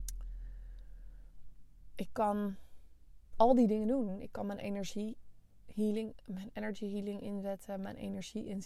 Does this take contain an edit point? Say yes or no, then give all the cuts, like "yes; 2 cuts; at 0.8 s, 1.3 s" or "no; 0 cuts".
no; 0 cuts